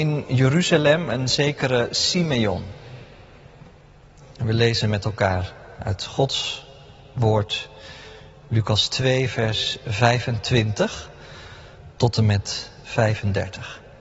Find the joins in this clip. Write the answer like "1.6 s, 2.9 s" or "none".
4.2 s